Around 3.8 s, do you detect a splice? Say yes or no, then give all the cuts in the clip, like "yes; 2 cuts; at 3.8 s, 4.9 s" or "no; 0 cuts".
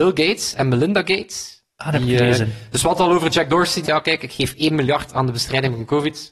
yes; 1 cut; at 3.8 s